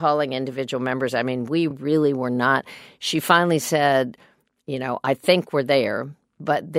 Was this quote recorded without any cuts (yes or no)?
yes